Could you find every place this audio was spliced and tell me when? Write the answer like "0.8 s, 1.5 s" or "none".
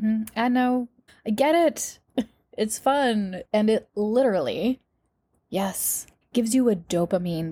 1.1 s, 3.4 s, 6.2 s